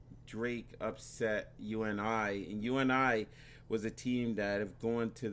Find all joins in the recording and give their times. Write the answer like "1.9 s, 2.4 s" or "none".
none